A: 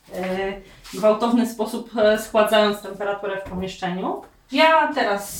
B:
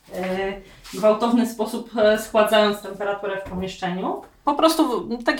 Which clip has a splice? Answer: B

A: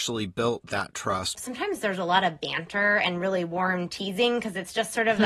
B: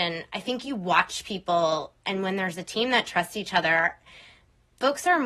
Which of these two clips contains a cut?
A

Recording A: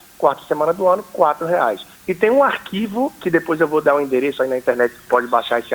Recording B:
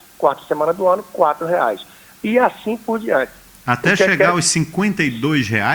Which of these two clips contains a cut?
A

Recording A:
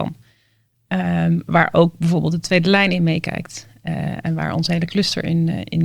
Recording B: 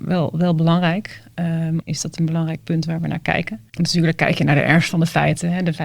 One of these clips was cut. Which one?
B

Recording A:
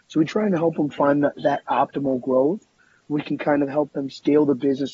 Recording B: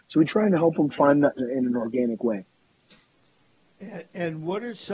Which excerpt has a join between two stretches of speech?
B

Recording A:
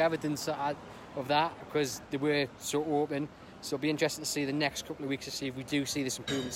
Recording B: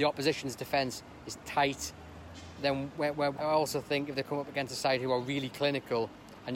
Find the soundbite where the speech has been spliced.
B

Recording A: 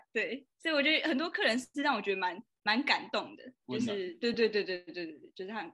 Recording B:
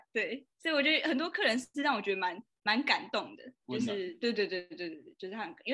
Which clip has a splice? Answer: B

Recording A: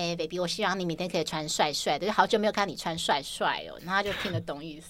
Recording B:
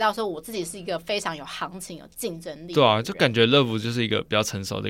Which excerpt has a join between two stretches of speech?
A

